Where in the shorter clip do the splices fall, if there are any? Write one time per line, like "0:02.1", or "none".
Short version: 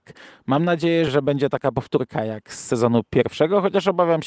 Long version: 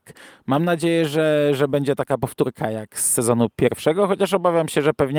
0:01.1